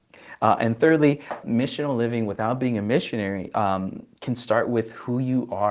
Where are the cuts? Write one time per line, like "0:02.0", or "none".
0:01.4